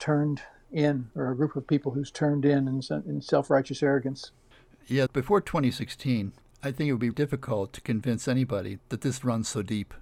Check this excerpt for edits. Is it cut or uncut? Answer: cut